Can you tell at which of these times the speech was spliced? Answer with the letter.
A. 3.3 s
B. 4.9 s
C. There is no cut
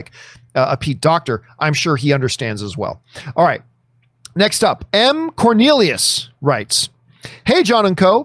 B